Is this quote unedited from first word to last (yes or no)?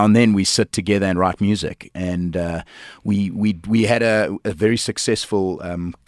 yes